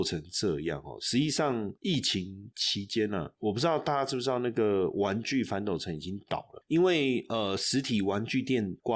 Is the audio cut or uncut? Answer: uncut